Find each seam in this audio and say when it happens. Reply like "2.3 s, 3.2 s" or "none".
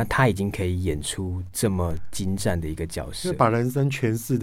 none